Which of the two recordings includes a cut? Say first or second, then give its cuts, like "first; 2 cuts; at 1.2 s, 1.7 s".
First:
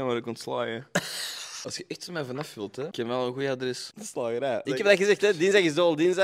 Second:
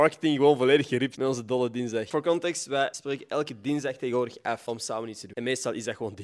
first; 1 cut; at 4.6 s